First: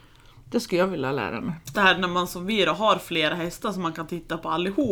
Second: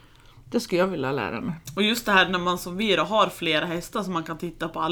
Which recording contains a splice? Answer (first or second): first